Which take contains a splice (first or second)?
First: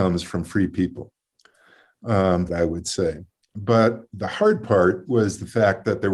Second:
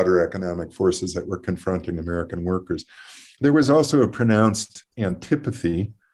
first